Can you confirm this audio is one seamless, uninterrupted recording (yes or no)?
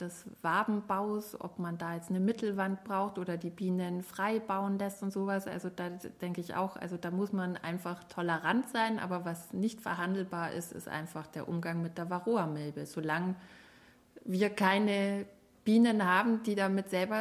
yes